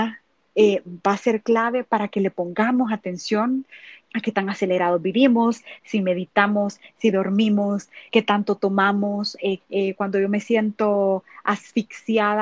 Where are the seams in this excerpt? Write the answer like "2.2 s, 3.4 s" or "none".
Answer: 8.1 s, 9.6 s